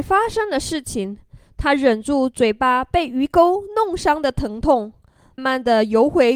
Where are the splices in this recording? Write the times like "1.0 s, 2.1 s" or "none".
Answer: 5.4 s